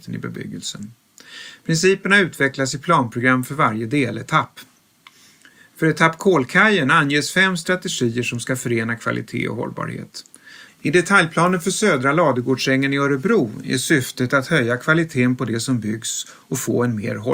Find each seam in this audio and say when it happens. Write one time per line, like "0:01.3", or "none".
0:10.7